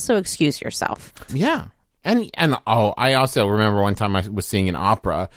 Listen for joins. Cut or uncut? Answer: cut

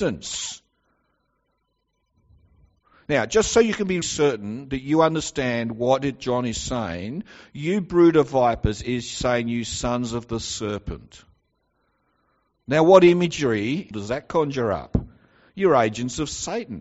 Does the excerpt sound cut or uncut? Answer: cut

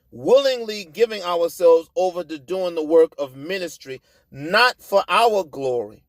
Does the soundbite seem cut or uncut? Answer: uncut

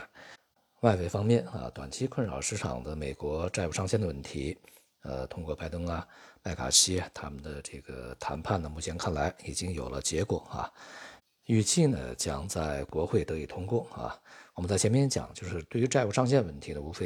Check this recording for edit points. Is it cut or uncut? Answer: uncut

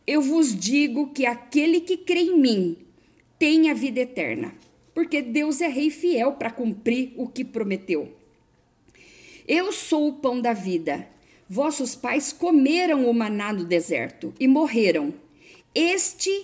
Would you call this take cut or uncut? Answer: uncut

